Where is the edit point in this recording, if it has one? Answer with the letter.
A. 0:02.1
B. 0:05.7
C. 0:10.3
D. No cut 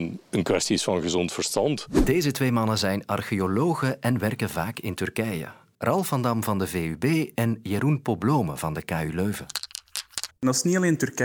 C